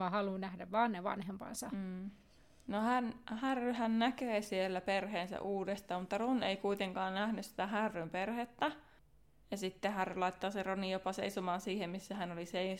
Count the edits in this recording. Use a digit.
0